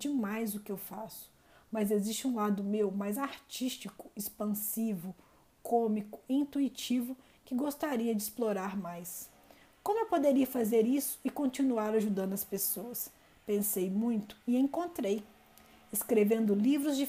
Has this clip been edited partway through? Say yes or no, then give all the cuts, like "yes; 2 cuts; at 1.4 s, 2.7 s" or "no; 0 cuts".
no; 0 cuts